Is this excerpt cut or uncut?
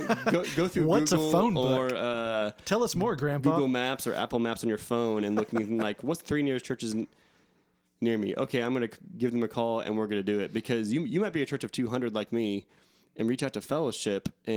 uncut